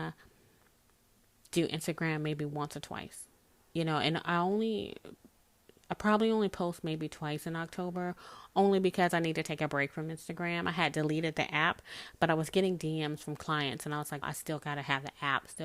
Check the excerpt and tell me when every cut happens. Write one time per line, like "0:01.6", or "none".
0:14.2